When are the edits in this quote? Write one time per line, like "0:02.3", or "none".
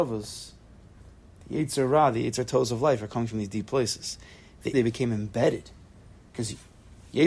0:04.7